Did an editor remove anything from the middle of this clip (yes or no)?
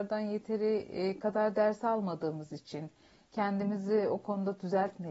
no